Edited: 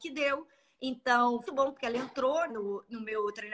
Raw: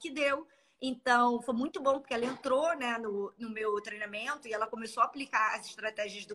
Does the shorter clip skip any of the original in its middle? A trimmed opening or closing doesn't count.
yes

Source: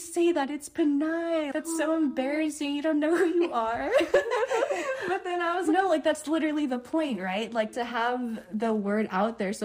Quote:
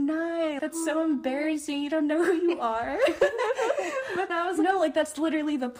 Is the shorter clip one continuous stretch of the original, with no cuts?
no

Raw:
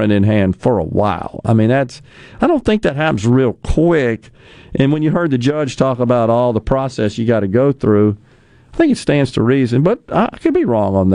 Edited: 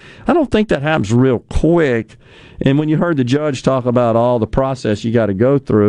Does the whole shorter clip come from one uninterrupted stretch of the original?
yes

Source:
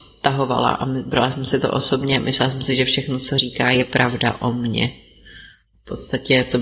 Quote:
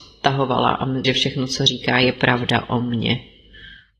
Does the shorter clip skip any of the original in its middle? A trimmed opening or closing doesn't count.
yes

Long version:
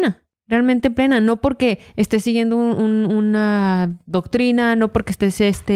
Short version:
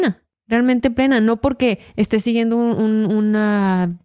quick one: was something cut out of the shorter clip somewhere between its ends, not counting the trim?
no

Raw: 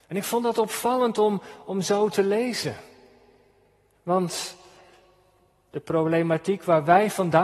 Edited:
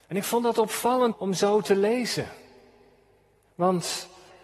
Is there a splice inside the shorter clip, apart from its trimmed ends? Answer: yes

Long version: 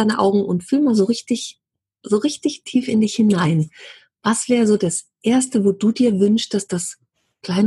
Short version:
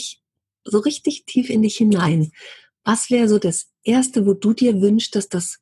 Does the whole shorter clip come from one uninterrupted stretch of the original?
yes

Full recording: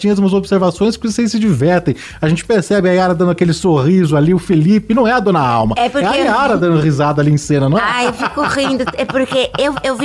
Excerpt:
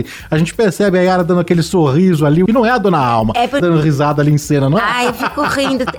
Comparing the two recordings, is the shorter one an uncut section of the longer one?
no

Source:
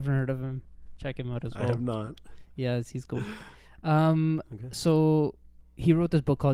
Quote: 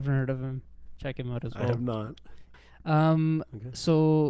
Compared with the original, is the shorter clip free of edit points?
no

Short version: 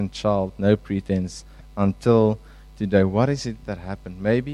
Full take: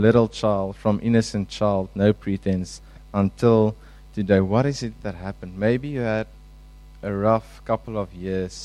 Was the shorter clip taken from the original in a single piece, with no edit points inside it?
yes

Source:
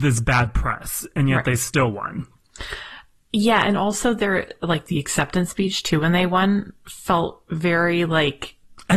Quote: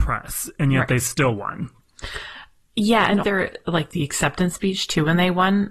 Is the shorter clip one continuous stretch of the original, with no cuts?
no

